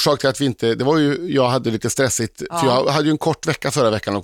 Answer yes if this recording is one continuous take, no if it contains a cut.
yes